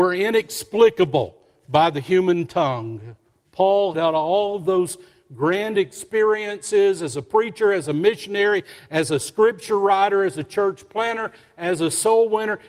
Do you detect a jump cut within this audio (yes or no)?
yes